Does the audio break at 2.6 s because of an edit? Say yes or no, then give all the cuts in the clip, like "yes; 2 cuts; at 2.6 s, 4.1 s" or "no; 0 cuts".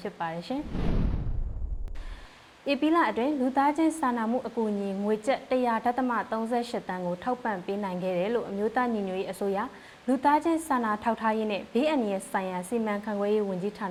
no; 0 cuts